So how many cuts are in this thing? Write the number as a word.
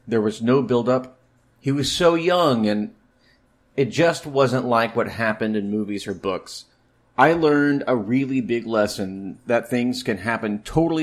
zero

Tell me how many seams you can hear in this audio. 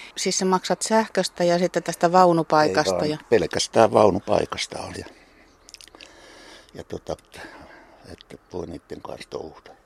two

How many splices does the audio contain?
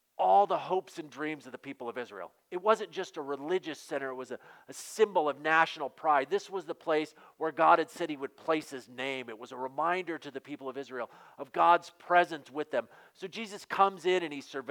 zero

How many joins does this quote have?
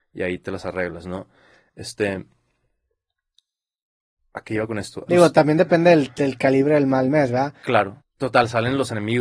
two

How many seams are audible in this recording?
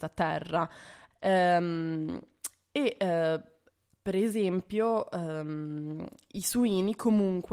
one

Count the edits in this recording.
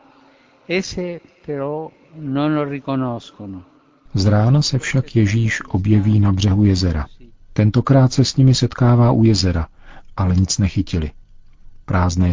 two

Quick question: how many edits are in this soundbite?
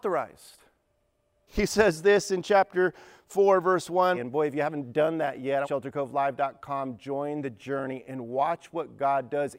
three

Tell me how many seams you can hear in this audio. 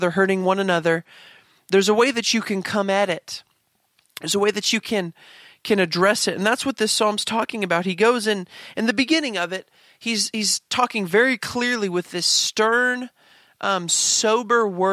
zero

